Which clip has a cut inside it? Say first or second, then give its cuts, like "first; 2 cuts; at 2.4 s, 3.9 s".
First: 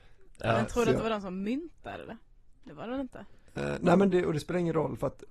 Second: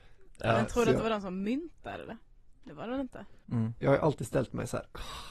second; 1 cut; at 3.4 s